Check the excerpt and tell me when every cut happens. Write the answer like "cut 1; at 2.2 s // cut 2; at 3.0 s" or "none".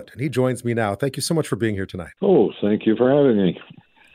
cut 1; at 2.2 s